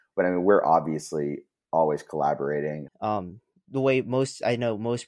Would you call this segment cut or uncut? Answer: cut